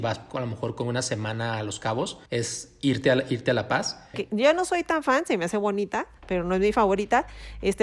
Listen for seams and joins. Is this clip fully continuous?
no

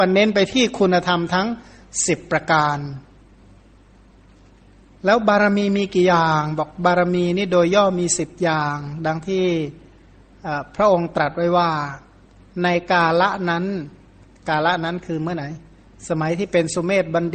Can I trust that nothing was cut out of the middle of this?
yes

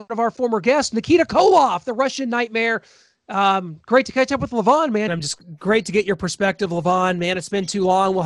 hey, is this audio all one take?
no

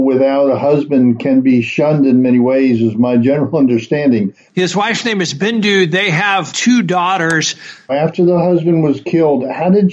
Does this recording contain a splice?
yes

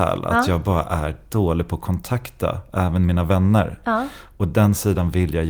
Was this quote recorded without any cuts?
yes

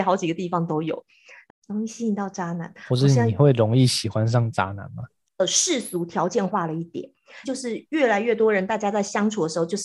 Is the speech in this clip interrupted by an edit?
yes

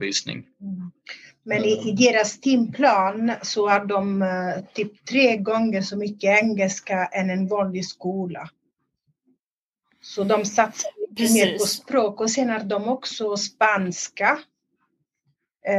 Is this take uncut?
yes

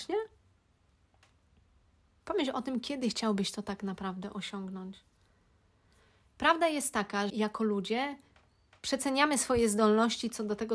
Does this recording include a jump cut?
yes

